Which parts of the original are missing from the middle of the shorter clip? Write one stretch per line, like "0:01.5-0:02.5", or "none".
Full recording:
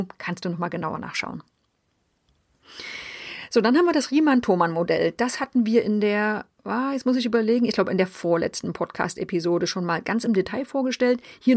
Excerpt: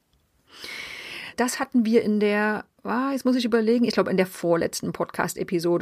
0:03.5-0:05.1